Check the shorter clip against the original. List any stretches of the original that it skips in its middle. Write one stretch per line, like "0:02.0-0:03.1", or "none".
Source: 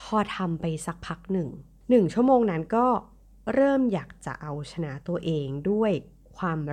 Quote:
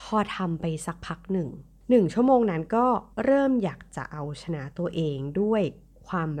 0:03.1-0:03.4